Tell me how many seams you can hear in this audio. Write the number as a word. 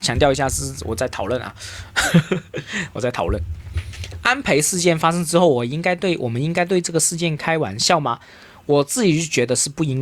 zero